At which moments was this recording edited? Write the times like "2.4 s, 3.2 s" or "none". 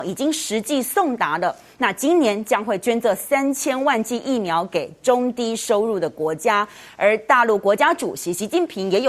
none